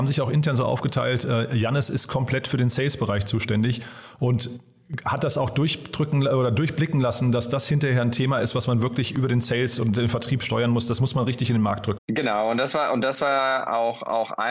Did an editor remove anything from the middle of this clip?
yes; 1 cut; at 12.0 s

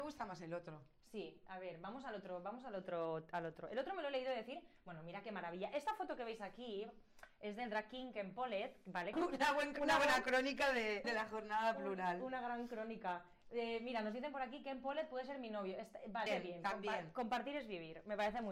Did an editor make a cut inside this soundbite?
yes; 3 cuts; at 9.1 s, 11.0 s, 16.3 s

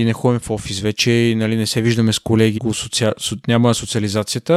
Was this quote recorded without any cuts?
no; 1 cut; at 2.6 s

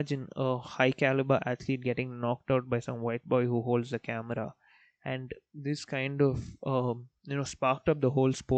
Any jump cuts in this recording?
no; 0 cuts

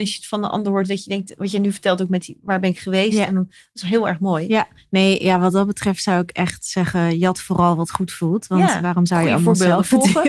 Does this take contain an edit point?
no; 0 cuts

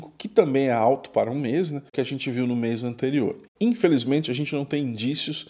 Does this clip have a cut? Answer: no; 0 cuts

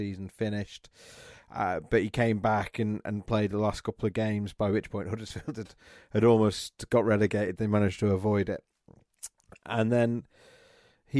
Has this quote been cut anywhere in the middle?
no; 0 cuts

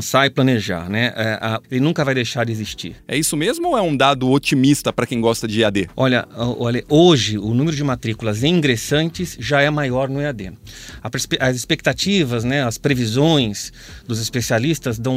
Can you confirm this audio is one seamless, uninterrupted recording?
no; 2 cuts; at 1.6 s, 3.0 s

